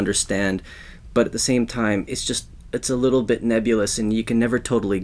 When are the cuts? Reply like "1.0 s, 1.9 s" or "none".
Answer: none